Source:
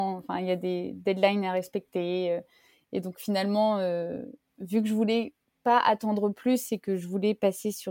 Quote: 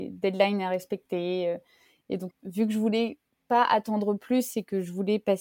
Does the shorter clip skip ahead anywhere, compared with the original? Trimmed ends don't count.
yes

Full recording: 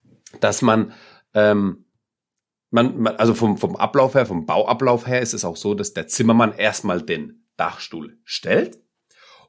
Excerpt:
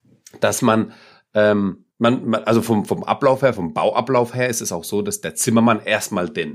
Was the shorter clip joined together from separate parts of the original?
yes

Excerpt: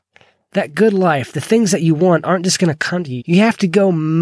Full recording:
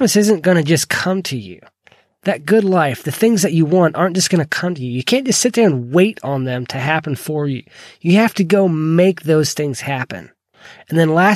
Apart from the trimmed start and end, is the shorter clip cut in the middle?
yes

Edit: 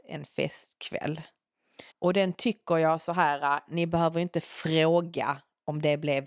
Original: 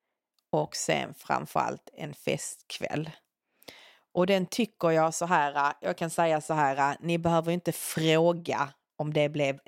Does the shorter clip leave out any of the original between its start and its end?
yes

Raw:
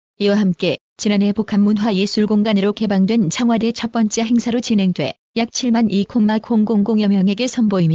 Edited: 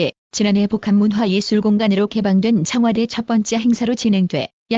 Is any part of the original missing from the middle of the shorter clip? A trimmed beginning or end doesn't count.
no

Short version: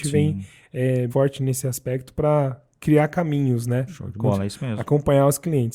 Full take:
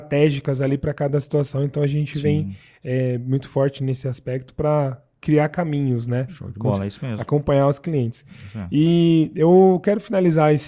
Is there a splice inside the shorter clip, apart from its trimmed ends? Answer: yes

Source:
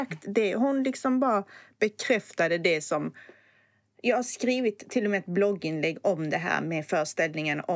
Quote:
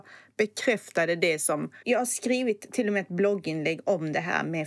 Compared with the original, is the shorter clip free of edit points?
no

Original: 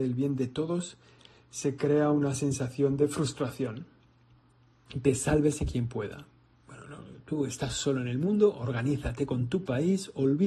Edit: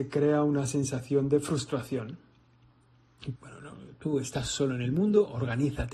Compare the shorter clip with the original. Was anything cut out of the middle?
yes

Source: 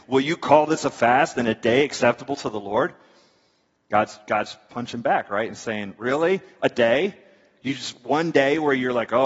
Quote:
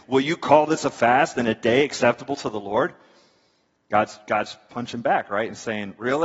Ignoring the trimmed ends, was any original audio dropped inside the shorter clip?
no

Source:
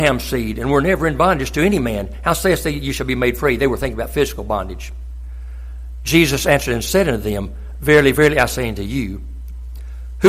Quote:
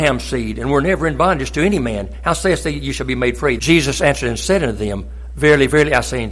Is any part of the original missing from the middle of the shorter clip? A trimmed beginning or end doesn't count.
yes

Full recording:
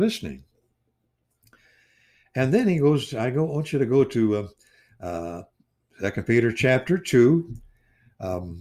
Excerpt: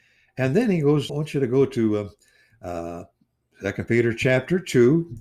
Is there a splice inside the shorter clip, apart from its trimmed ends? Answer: yes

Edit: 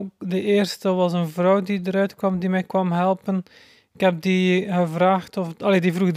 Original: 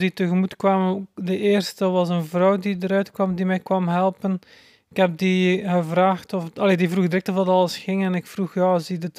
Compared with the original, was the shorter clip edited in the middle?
no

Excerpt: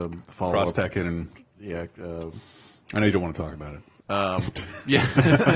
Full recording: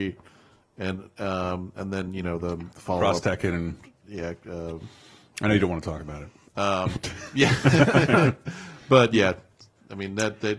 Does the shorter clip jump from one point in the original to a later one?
no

